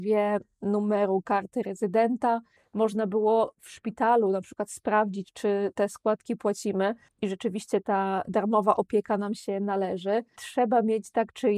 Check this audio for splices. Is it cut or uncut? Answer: cut